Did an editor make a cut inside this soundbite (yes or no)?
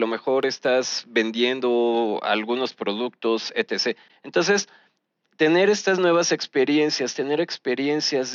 yes